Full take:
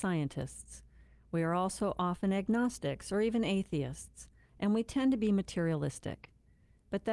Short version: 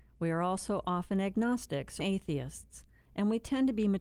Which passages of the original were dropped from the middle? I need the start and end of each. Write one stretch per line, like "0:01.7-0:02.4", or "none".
0:03.1-0:03.4